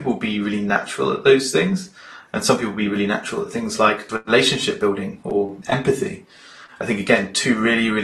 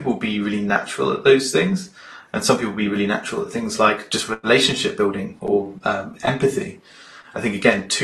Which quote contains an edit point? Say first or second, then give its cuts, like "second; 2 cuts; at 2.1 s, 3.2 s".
first; 2 cuts; at 4.1 s, 5.6 s